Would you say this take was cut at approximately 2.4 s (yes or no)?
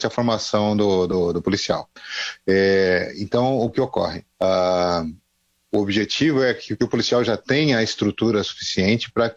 no